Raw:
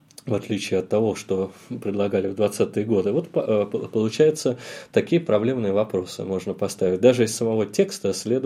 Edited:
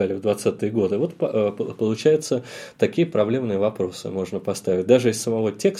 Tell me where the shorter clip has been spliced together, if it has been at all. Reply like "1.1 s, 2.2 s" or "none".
none